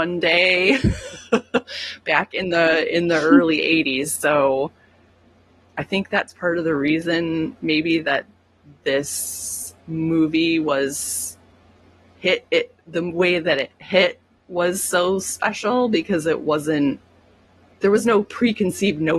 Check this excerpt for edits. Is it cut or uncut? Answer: uncut